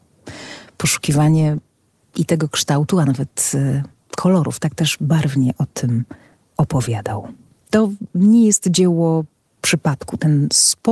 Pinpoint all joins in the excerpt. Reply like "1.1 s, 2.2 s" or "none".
7.6 s